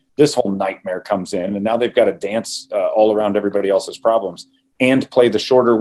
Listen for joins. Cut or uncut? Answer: uncut